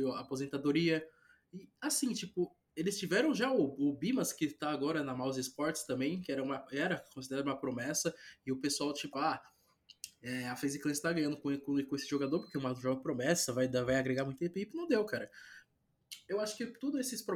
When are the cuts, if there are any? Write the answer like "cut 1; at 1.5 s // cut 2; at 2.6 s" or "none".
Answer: cut 1; at 9.1 s